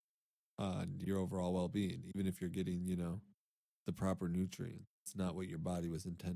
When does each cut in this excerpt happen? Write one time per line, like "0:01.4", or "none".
0:04.9